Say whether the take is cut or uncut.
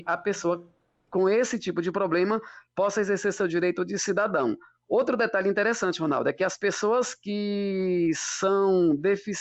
uncut